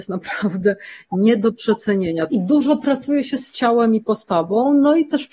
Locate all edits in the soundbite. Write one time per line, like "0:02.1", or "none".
0:02.3

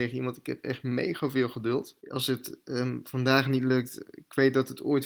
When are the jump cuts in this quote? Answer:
0:02.0

